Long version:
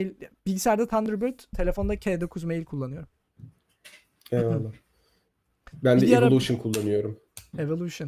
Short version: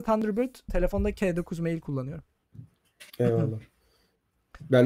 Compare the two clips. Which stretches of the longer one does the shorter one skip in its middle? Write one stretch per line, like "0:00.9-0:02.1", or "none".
0:03.9-0:04.2